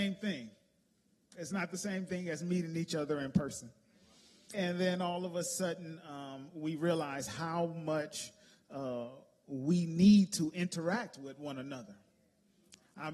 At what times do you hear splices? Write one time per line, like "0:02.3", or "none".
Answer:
0:04.5

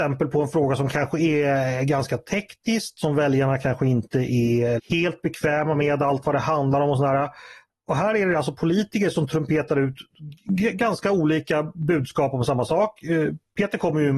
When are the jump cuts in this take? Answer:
0:04.8

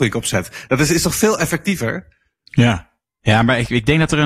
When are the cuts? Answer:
none

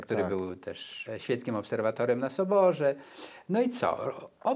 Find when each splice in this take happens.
0:01.1

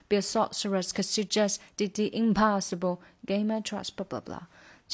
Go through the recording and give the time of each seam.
none

